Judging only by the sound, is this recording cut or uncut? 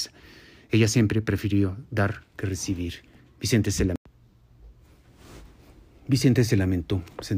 cut